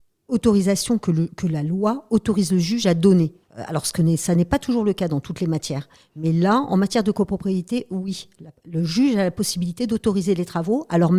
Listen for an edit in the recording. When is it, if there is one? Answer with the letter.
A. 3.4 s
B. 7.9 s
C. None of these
A